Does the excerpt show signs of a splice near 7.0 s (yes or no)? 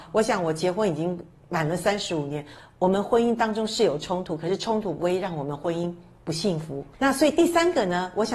no